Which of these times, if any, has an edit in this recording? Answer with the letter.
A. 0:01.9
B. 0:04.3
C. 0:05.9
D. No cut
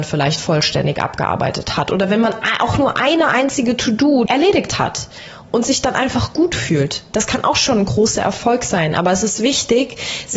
B